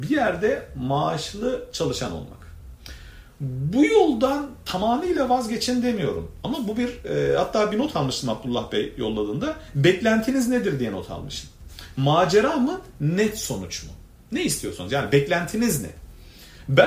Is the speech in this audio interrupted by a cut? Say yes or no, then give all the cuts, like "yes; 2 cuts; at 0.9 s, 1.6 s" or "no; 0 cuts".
no; 0 cuts